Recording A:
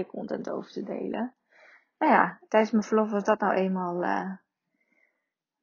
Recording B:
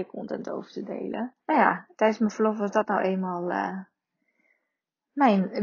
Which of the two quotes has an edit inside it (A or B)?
B